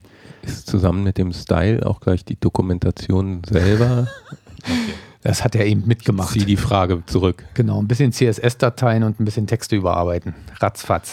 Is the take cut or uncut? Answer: uncut